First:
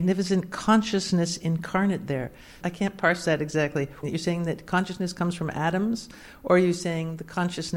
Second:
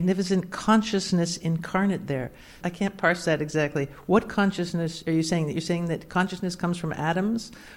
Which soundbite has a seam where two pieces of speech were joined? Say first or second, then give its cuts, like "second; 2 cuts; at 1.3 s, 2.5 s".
first; 1 cut; at 4.0 s